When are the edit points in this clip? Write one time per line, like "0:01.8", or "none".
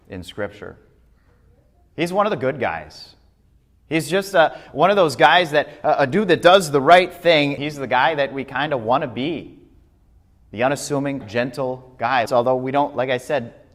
0:07.6
0:11.2
0:12.3